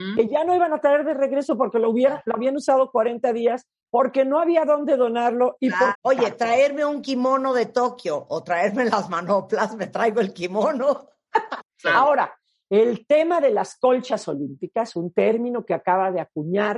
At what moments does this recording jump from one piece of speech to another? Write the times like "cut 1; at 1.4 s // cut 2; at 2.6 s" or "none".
cut 1; at 5.9 s // cut 2; at 11.6 s